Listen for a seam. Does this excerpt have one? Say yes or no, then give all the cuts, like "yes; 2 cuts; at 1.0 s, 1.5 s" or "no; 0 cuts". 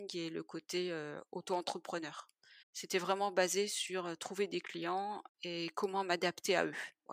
yes; 1 cut; at 2.6 s